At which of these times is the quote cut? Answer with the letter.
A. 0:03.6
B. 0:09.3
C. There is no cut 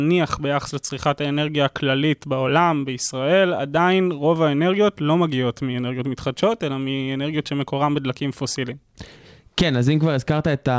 C